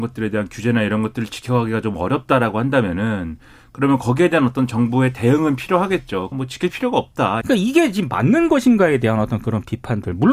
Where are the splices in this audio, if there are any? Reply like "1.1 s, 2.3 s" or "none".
6.3 s, 7.4 s